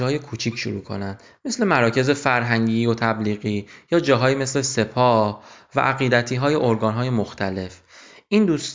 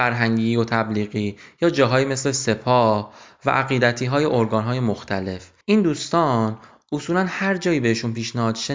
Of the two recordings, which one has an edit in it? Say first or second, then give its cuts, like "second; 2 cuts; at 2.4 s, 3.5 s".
second; 1 cut; at 5.6 s